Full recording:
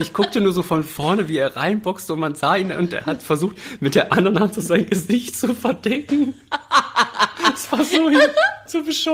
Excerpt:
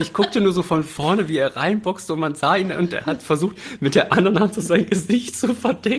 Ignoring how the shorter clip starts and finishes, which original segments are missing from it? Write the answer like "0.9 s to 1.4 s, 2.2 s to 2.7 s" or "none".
none